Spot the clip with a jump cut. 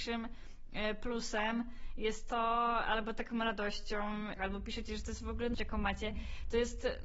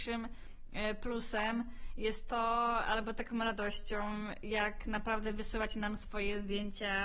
first; 2 cuts; at 4.4 s, 5.5 s

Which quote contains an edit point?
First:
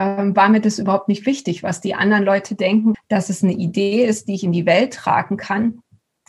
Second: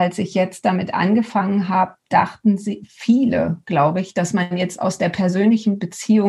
first; 1 cut; at 2.9 s

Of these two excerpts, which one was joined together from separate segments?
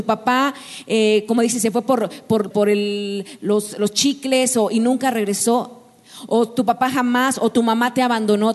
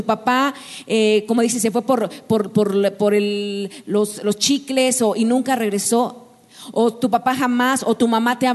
first; 1 cut; at 2.5 s

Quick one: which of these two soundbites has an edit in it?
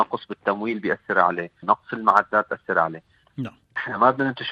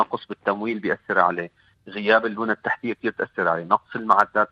first; 2 cuts; at 1.6 s, 3.3 s

